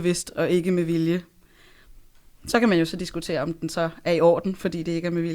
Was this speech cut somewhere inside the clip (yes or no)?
no